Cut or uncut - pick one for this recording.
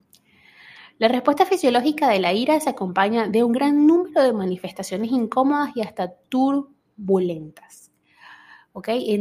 uncut